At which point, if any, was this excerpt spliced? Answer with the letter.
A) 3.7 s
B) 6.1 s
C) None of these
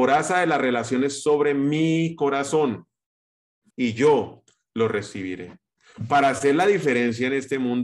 A